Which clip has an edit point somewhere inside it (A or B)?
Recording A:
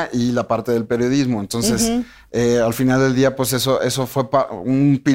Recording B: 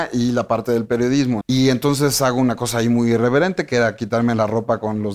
B